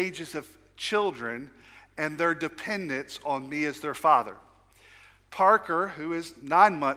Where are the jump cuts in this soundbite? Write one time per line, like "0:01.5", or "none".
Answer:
none